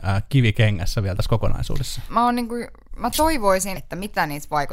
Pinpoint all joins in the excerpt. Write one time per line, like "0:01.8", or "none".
0:02.1
0:03.7